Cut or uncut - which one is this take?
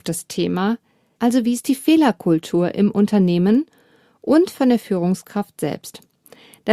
cut